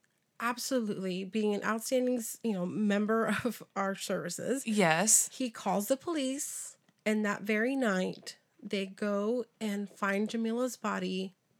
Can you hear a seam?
no; 0 cuts

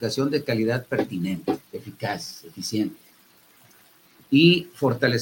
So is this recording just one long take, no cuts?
no; 2 cuts; at 1.7 s, 4.2 s

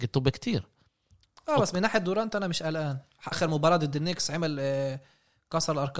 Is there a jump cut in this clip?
yes; 1 cut; at 3.3 s

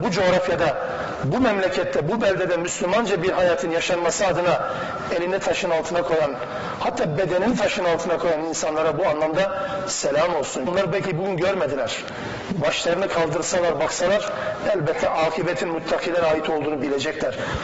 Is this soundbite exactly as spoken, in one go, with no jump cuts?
no; 1 cut; at 10.7 s

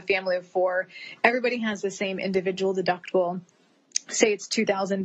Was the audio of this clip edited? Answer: no; 0 cuts

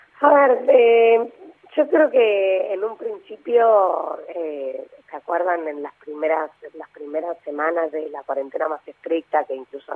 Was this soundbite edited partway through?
no; 0 cuts

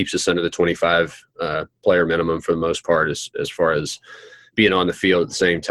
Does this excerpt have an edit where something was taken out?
no; 0 cuts

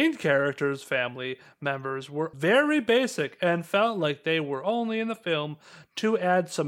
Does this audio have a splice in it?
yes; 1 cut; at 2.3 s

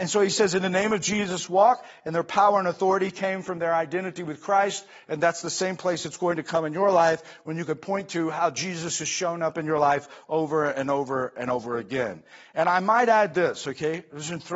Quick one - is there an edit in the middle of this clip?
no; 0 cuts

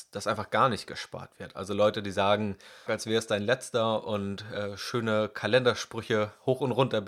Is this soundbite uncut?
no; 1 cut; at 2.9 s

